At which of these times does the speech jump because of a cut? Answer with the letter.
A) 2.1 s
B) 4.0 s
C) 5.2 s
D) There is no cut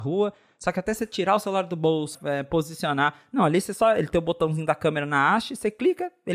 A